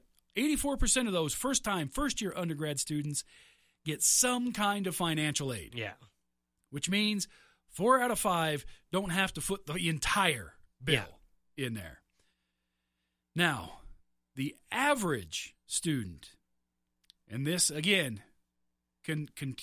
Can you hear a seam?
no; 0 cuts

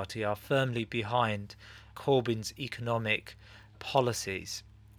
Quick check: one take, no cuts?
no; 2 cuts; at 1.9 s, 3.7 s

